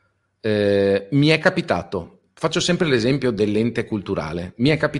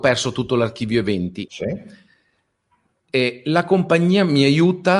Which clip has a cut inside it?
second; 1 cut; at 1.5 s

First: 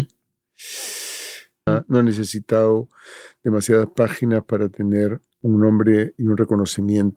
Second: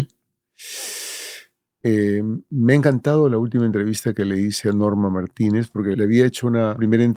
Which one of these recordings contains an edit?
first; 2 cuts; at 1.7 s, 5.3 s

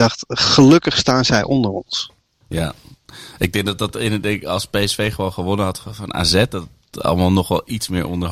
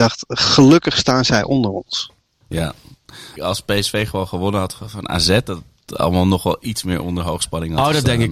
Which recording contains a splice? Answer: second; 1 cut; at 3.4 s

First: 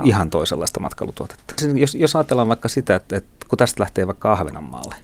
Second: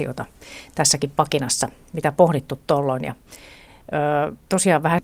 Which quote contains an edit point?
first; 1 cut; at 1.6 s

